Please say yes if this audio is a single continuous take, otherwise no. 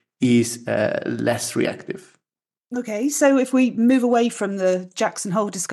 yes